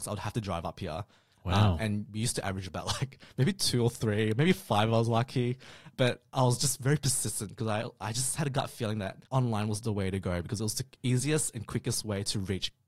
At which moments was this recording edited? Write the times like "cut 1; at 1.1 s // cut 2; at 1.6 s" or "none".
cut 1; at 9.3 s